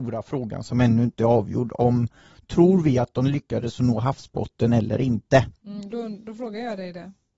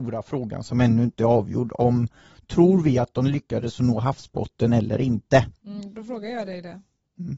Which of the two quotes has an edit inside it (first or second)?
second